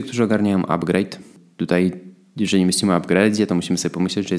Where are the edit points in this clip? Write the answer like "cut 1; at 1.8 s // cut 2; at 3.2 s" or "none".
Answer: none